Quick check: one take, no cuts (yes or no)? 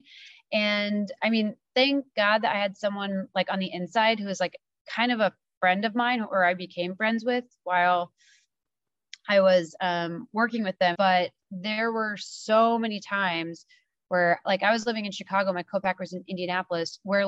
no